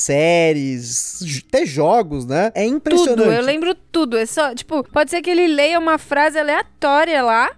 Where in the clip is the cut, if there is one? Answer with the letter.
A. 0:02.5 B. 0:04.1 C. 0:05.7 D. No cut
A